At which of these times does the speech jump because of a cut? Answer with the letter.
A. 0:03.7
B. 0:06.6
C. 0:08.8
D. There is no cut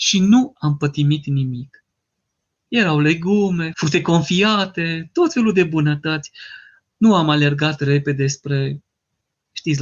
A